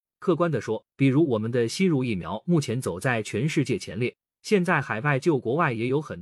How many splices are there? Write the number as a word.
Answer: one